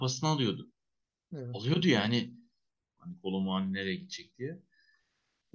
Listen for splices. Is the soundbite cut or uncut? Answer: cut